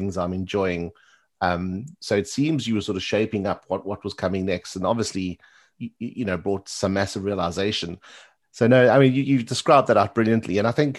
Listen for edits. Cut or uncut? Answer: cut